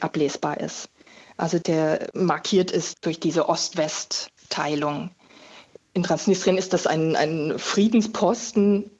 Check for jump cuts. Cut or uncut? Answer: uncut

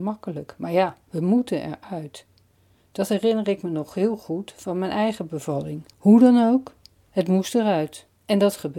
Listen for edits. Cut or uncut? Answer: cut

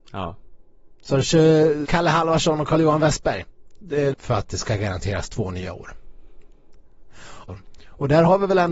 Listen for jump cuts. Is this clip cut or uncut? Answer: cut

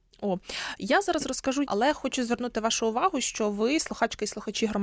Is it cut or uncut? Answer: cut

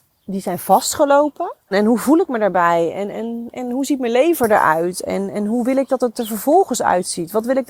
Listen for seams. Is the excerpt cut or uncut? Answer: cut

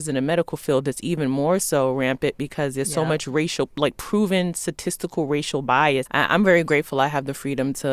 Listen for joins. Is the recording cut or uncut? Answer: cut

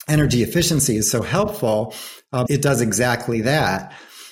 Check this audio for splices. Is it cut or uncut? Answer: cut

